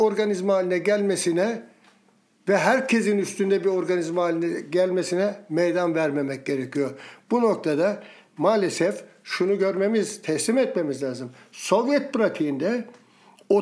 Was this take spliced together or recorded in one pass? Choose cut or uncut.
uncut